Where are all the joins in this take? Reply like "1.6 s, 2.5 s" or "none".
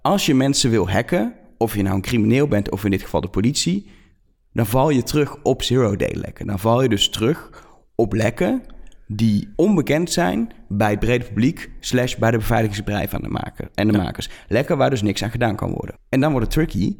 9.5 s, 16.0 s